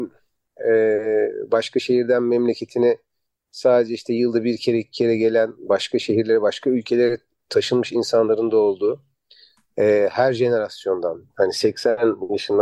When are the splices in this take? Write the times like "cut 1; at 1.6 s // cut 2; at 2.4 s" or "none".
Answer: none